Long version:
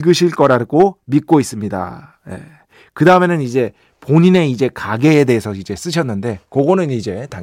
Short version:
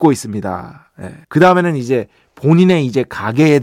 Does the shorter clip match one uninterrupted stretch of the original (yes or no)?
no